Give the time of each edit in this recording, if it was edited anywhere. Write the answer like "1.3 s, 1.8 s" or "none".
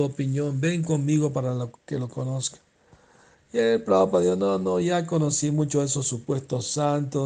none